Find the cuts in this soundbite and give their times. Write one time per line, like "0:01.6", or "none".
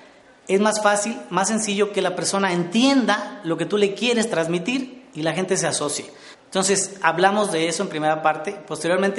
0:06.3